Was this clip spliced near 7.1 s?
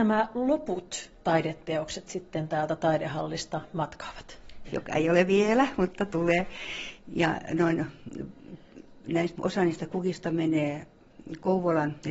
no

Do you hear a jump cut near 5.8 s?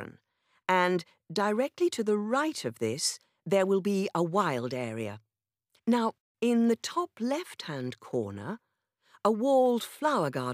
yes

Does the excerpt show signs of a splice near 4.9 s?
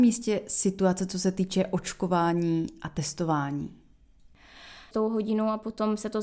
yes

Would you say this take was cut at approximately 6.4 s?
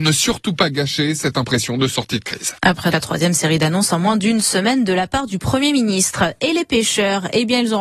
no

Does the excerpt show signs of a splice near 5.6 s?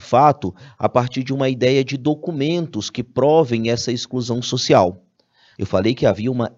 yes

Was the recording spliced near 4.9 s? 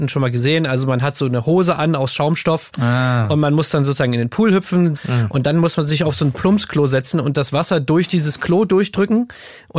yes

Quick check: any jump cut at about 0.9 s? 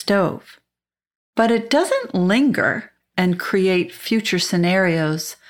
no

